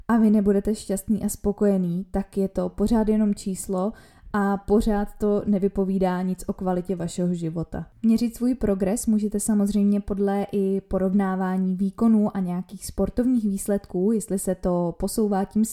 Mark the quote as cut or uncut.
uncut